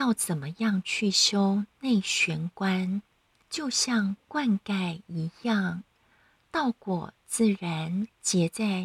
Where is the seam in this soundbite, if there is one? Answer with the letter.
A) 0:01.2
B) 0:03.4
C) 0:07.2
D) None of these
B